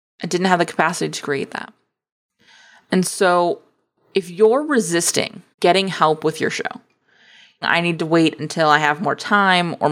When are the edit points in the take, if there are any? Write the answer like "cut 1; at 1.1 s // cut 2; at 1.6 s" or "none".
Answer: cut 1; at 5.5 s // cut 2; at 7.6 s